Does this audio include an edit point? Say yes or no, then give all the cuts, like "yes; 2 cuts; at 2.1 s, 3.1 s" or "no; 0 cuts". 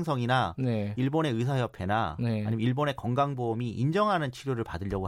no; 0 cuts